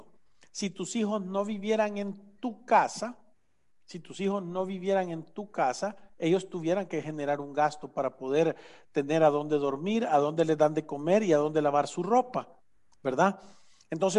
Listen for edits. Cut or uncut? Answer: uncut